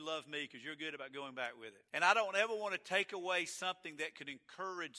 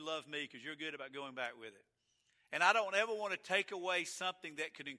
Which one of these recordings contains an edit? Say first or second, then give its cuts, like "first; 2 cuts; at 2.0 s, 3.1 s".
first; 1 cut; at 1.9 s